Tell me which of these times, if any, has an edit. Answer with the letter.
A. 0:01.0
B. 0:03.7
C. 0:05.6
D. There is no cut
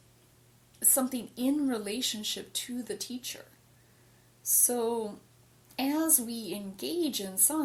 D